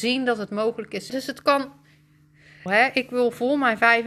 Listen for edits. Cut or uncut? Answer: cut